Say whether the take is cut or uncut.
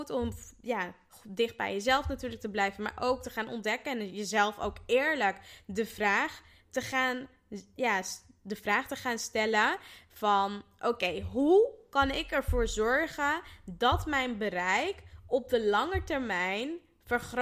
uncut